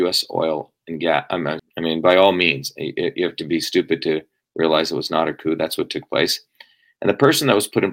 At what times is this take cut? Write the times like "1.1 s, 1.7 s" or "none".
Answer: 1.6 s

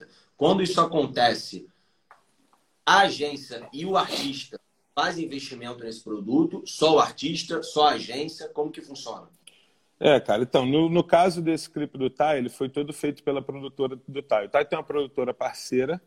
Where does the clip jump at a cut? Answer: none

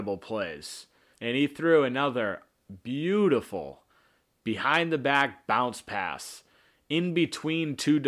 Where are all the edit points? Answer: 1.1 s

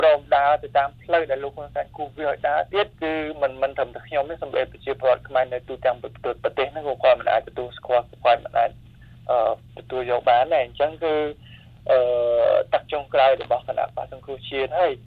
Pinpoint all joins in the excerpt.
2.9 s

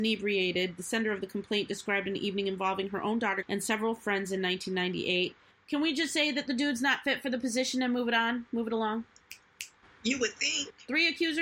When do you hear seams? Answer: 3.4 s, 5.5 s

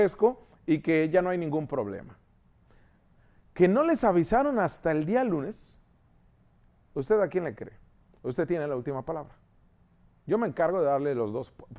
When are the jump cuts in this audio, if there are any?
none

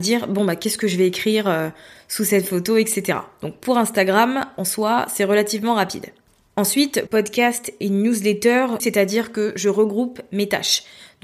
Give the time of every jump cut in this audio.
7.1 s, 8.8 s

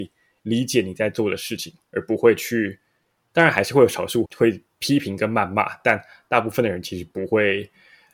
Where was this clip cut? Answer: 4.2 s

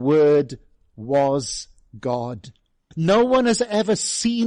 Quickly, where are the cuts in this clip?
2.9 s

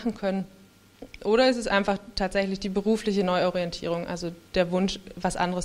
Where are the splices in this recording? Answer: 4.5 s

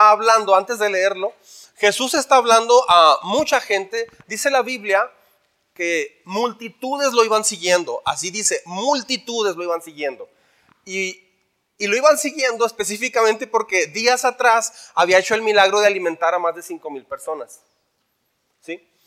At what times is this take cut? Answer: none

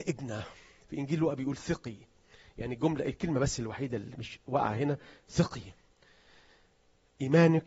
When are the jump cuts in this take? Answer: none

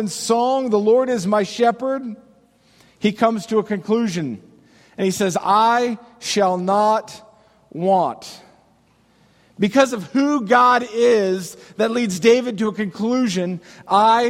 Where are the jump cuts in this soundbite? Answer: none

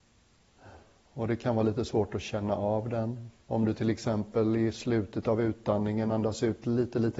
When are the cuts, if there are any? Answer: 1.0 s, 3.4 s

